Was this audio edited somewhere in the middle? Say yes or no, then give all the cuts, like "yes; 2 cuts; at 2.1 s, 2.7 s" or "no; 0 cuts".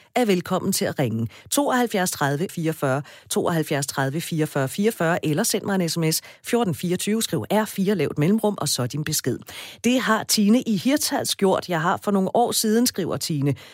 yes; 1 cut; at 2.5 s